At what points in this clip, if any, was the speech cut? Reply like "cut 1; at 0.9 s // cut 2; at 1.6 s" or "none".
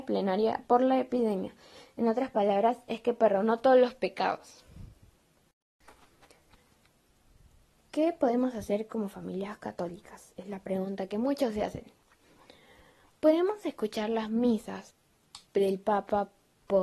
cut 1; at 15.5 s

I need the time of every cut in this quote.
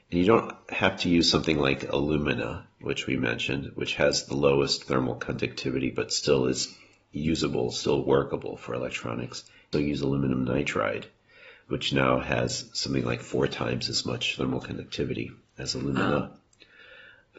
cut 1; at 9.7 s

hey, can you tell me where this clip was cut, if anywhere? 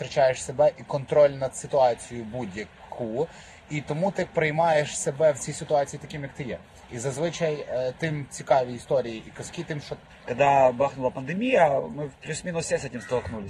cut 1; at 10.1 s

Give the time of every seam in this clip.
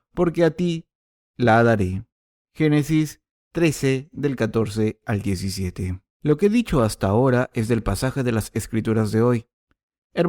cut 1; at 6.1 s

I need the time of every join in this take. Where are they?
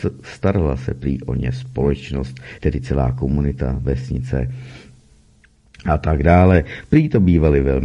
none

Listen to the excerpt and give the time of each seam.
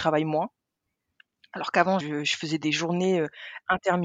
cut 1; at 2.0 s

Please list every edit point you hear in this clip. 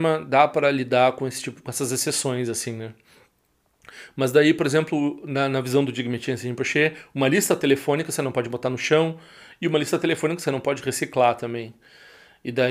none

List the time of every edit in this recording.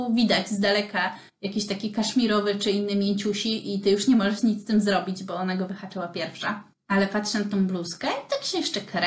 cut 1; at 1.3 s // cut 2; at 6.7 s

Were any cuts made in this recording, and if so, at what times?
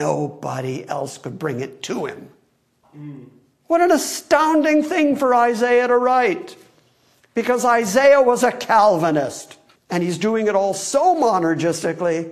cut 1; at 2.8 s // cut 2; at 9.8 s

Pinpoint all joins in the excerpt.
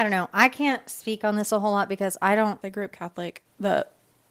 cut 1; at 2.6 s

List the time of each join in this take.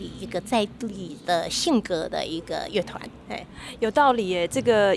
none

